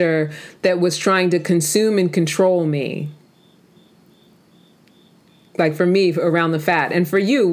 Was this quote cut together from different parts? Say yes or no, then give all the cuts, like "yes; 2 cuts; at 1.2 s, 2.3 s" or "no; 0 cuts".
no; 0 cuts